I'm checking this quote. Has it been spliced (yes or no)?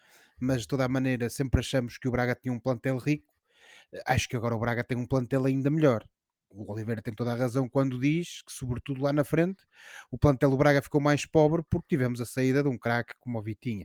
no